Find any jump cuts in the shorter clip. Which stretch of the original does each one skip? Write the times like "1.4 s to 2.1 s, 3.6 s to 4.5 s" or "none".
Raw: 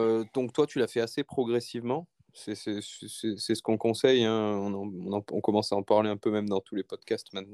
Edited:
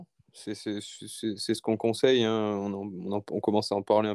none